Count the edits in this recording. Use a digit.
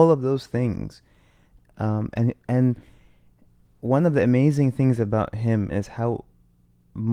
1